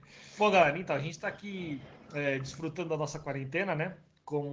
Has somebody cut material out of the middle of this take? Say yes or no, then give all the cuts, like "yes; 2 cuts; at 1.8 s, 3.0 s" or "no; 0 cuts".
no; 0 cuts